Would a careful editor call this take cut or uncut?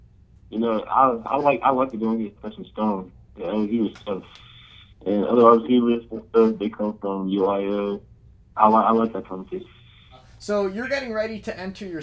cut